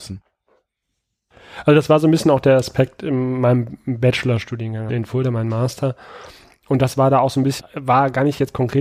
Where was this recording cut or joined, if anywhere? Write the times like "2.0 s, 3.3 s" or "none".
4.9 s, 7.6 s